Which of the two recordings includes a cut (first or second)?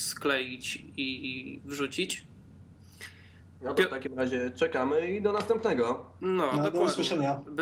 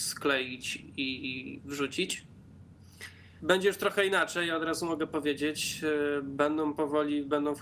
second